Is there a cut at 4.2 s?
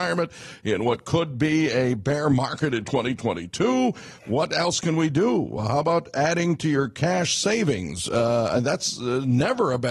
no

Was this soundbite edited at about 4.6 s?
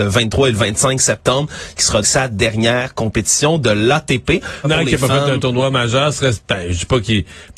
yes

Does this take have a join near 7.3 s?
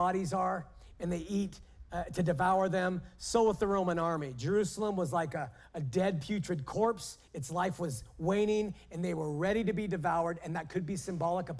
no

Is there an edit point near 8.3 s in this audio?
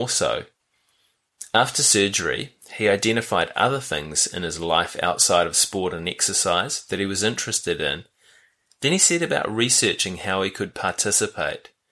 no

